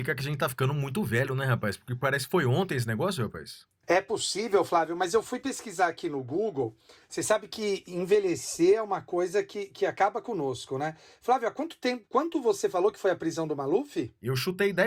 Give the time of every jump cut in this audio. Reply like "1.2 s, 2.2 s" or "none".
3.8 s